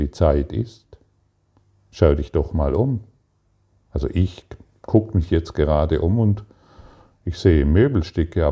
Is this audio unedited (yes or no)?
yes